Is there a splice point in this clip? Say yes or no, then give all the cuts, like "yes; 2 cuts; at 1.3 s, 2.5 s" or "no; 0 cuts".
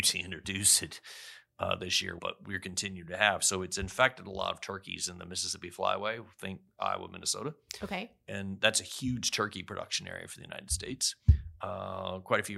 yes; 1 cut; at 2.2 s